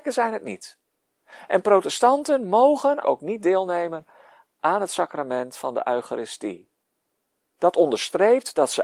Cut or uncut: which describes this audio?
cut